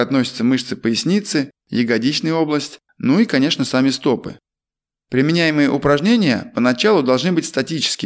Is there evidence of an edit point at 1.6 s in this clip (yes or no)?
no